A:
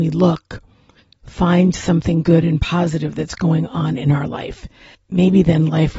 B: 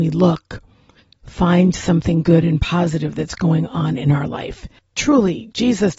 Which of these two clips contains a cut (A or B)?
B